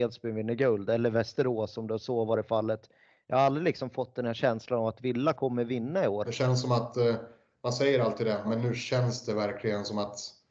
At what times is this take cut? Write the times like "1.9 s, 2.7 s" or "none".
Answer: 6.2 s, 8.4 s